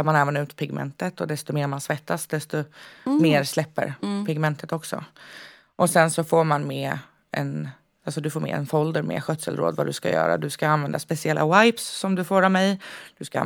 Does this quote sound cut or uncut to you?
uncut